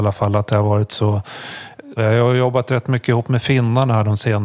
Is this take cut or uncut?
cut